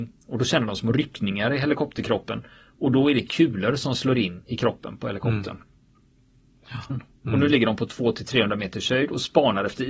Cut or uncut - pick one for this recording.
cut